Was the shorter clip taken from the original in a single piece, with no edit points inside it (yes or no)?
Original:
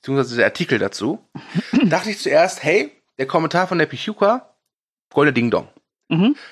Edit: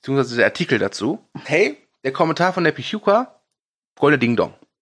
no